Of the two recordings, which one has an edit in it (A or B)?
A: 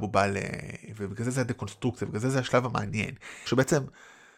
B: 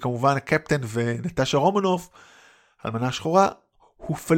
A